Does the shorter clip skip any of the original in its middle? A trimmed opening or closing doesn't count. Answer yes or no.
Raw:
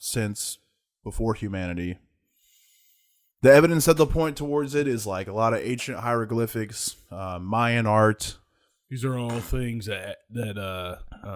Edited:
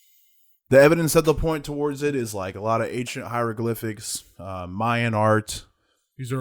no